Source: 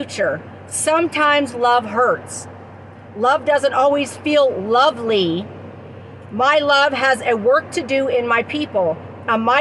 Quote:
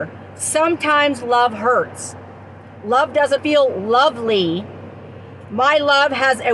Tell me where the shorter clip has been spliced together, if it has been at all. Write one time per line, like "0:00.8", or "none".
0:03.4